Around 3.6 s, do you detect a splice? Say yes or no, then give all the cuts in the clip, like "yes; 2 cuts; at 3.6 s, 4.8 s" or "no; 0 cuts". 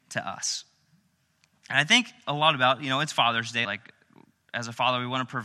yes; 1 cut; at 3.6 s